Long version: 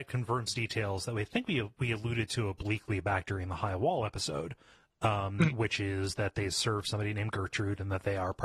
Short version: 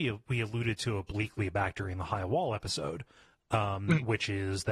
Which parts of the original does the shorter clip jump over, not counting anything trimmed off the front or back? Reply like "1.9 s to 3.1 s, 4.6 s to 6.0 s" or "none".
none